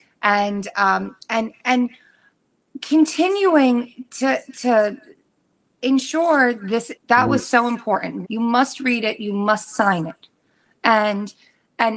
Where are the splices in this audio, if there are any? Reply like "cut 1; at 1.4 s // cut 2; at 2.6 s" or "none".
cut 1; at 6.9 s // cut 2; at 8.2 s